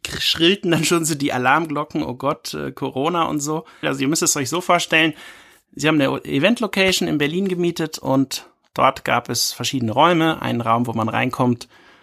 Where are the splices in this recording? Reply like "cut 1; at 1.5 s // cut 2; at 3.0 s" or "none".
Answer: cut 1; at 3.8 s